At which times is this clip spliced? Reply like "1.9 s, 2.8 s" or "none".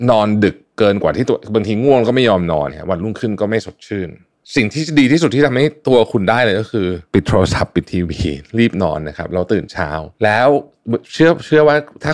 2.7 s, 7.1 s, 10.1 s